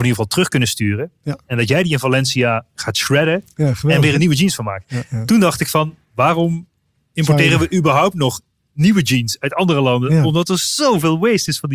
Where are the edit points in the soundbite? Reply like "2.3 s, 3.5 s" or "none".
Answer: none